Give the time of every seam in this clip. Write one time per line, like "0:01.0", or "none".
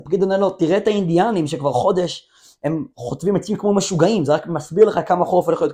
none